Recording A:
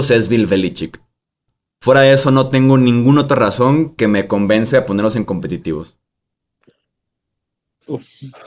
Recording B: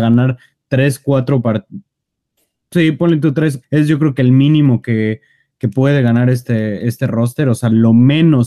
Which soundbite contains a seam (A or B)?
B